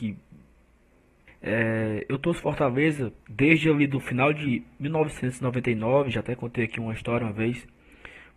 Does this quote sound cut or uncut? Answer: cut